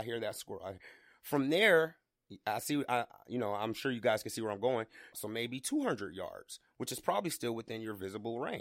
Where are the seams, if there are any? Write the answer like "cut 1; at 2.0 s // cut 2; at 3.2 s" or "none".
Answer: cut 1; at 5.1 s